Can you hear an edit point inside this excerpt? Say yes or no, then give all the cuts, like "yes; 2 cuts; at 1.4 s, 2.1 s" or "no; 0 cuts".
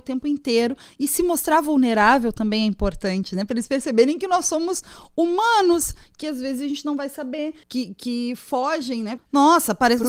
yes; 2 cuts; at 7.6 s, 9.2 s